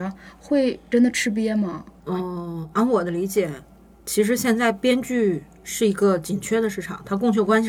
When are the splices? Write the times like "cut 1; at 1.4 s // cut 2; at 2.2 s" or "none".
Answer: cut 1; at 2.0 s